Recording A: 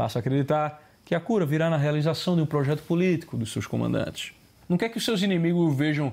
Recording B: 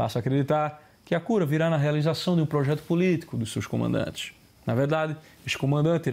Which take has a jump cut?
A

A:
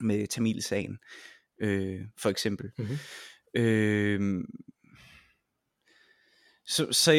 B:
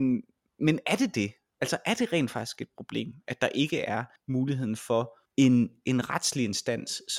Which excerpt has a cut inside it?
B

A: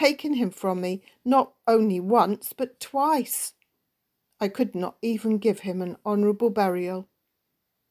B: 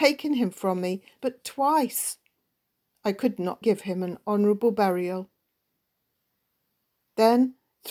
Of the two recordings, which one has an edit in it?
B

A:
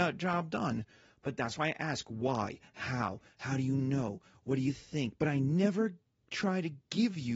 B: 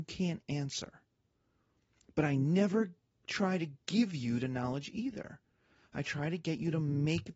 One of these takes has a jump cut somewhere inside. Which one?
A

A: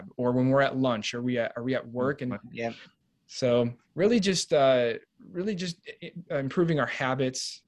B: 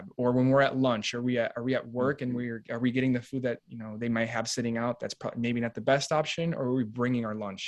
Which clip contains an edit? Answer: A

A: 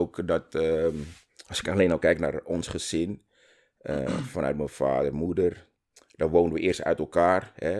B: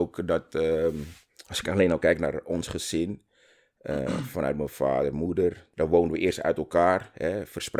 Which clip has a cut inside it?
B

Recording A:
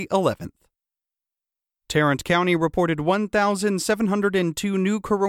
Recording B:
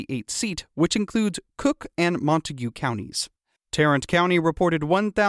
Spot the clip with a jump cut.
B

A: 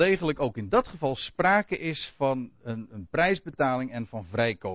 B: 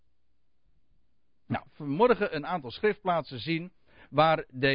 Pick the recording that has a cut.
B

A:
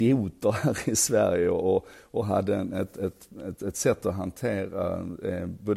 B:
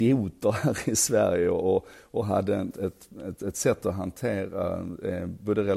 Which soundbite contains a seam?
B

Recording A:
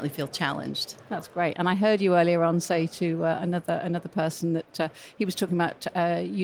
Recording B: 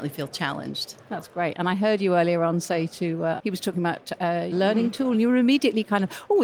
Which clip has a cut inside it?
B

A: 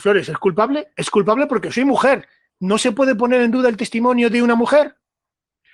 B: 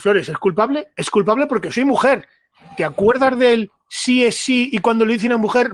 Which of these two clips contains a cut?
A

